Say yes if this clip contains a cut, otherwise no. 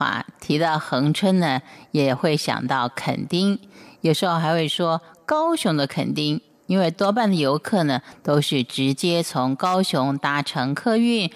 no